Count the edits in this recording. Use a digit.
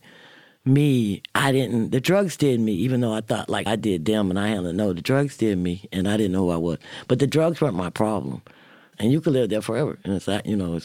3